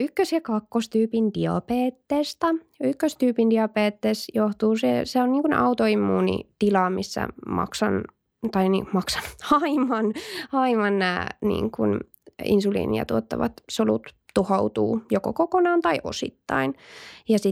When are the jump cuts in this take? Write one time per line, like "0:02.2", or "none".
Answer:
none